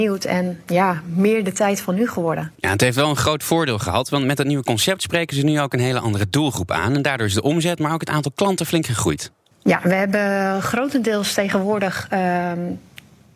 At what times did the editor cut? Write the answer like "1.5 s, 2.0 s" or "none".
2.5 s